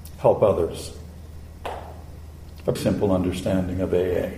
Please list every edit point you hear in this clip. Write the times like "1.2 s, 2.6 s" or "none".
2.8 s